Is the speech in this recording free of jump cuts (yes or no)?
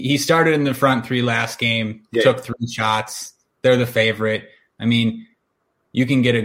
yes